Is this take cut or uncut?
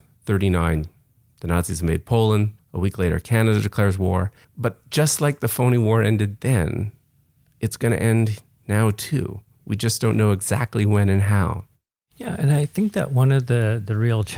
cut